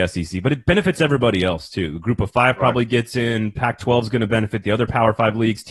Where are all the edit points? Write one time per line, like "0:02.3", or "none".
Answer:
none